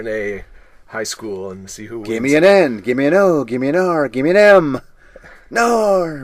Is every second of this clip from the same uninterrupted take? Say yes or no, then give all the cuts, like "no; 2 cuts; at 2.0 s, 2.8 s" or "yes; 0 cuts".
yes; 0 cuts